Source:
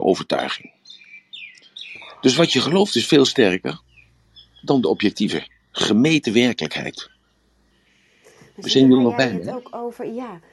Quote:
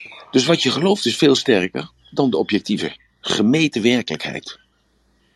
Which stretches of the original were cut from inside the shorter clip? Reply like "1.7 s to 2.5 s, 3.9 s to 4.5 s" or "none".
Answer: 3.9 s to 4.5 s